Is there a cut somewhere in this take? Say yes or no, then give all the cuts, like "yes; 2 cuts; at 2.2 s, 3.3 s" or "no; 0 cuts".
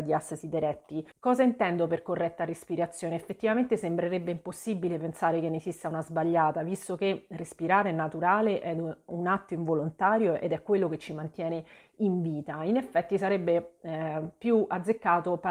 yes; 1 cut; at 1.1 s